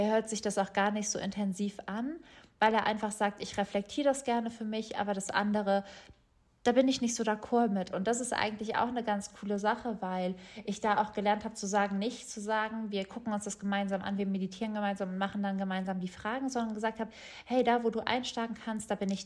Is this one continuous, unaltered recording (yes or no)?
yes